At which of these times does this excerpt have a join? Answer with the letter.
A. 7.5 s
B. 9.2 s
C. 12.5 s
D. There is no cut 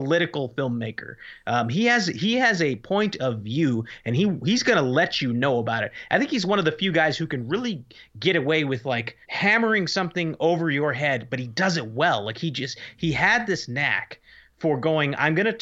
B